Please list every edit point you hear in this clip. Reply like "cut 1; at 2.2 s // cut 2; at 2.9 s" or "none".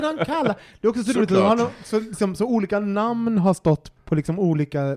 cut 1; at 4.0 s